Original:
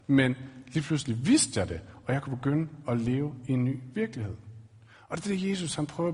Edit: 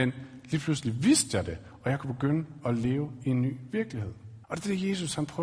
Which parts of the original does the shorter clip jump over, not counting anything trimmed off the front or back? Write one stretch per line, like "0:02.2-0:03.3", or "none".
0:04.7-0:05.0